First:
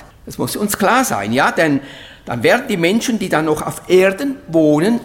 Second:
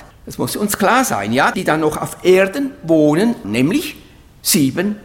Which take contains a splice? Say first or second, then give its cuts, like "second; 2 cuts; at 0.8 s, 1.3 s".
second; 2 cuts; at 1.5 s, 3.4 s